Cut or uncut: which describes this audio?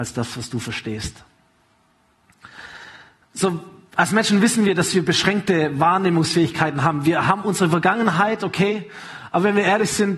uncut